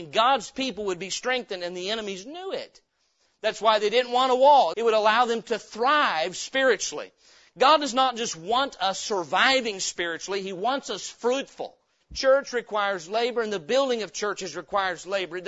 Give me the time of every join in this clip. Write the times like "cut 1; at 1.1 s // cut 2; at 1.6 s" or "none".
cut 1; at 4.7 s // cut 2; at 12.0 s